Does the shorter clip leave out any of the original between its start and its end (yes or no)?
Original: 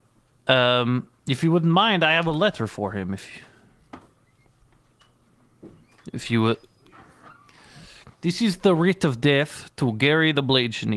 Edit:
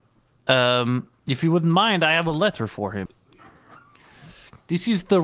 yes